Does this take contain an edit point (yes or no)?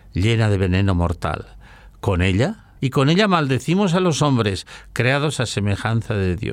yes